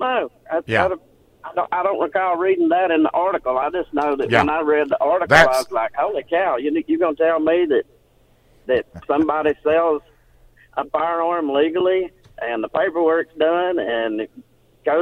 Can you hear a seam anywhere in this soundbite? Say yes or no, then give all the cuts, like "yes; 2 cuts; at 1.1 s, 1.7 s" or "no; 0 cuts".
no; 0 cuts